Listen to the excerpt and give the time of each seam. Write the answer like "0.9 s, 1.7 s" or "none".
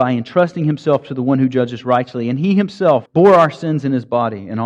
3.1 s